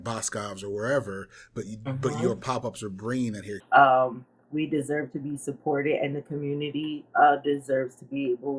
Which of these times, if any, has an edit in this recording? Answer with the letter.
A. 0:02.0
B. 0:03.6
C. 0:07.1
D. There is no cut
B